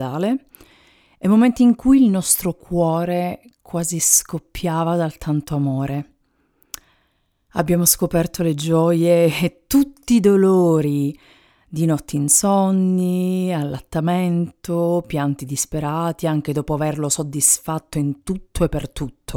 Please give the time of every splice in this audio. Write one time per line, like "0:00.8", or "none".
0:07.5